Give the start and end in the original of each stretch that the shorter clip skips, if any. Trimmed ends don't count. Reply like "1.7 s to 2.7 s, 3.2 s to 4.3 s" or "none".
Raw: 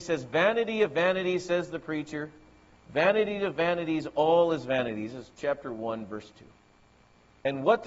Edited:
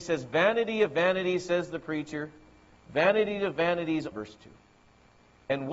4.1 s to 6.1 s